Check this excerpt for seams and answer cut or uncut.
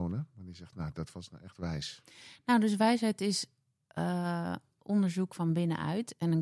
uncut